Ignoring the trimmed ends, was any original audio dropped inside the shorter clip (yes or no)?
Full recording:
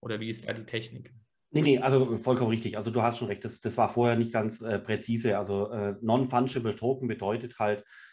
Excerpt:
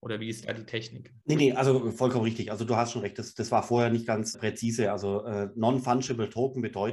yes